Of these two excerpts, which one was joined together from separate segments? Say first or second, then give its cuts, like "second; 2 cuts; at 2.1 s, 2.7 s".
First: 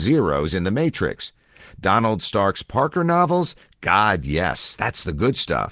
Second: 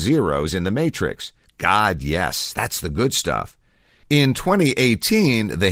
second; 1 cut; at 1.4 s